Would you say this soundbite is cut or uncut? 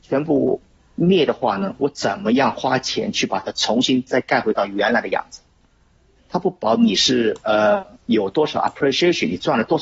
cut